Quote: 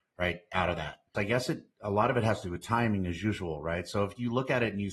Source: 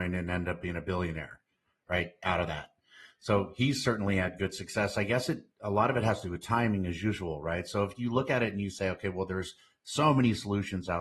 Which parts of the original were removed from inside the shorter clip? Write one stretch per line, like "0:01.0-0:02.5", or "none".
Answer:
0:02.9-0:04.9